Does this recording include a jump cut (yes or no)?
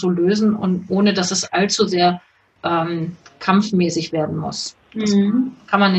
no